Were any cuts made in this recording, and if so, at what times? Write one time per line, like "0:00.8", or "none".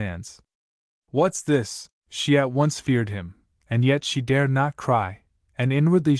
0:02.0